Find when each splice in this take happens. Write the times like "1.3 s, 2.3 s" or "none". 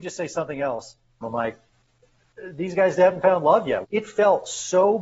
1.2 s, 3.8 s